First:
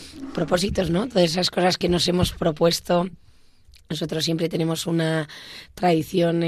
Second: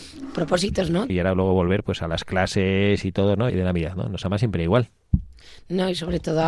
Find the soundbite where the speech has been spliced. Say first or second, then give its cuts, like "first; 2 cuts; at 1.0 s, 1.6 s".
second; 2 cuts; at 1.1 s, 3.5 s